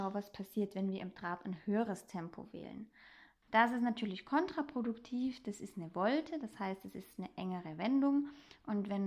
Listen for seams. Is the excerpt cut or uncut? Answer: cut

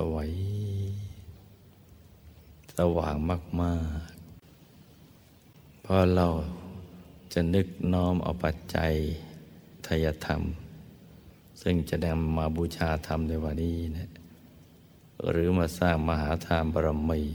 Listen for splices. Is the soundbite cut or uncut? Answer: cut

